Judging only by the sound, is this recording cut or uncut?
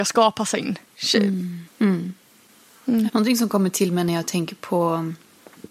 cut